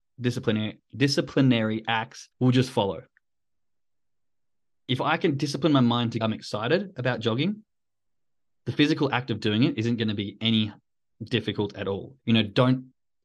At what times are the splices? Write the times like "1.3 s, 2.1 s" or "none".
2.3 s, 6.2 s, 12.2 s

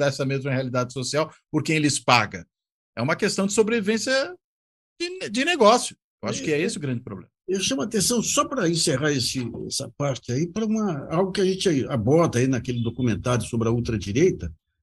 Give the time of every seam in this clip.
none

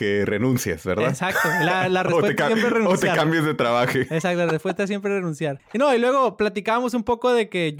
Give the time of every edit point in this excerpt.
none

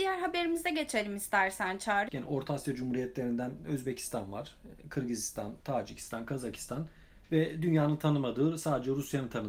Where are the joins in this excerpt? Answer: 2.1 s

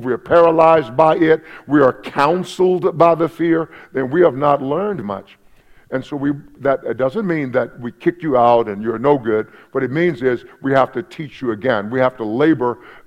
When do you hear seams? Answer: 5.0 s

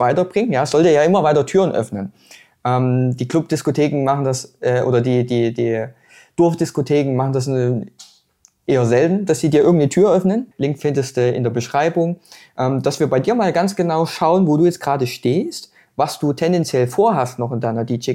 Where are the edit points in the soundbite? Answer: 10.5 s

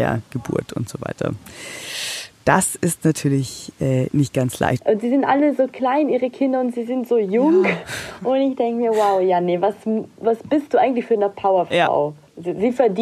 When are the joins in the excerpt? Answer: 4.8 s

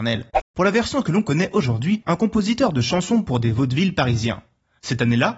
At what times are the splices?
2.0 s

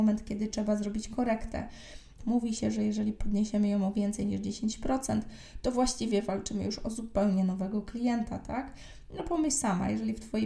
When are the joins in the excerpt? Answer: 2.2 s

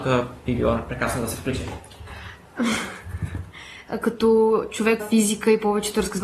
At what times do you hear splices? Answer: 3.9 s, 5.0 s

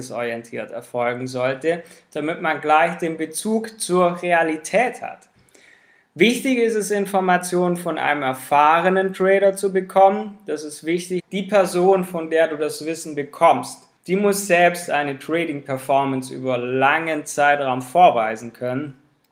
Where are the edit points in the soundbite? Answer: 11.2 s, 14.0 s

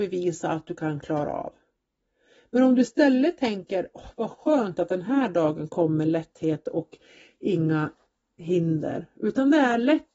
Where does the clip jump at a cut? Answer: none

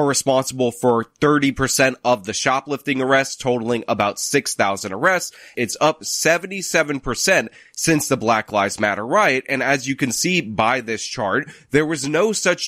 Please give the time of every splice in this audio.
5.5 s

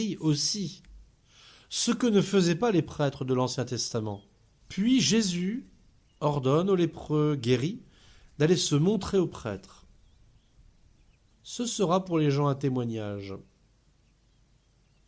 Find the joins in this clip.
4.6 s, 11.3 s

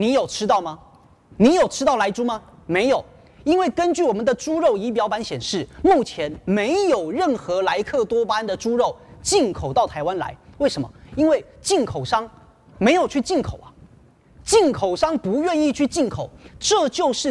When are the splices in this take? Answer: none

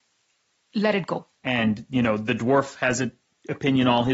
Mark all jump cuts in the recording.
1.4 s

